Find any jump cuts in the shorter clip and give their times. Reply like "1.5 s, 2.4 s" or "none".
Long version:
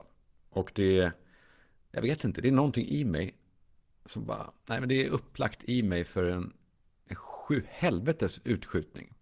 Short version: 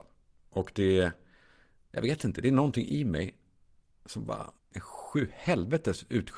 4.6 s